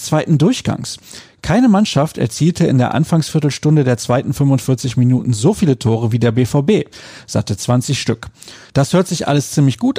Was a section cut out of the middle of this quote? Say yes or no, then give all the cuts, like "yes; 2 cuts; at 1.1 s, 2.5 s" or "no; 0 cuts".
yes; 1 cut; at 8.6 s